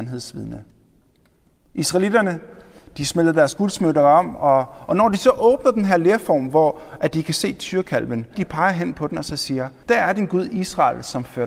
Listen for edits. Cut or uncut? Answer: cut